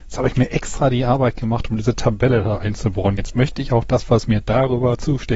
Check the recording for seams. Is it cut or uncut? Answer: uncut